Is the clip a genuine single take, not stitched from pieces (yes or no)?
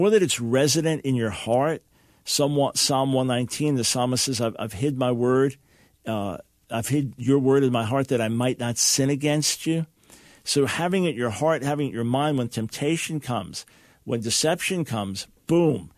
yes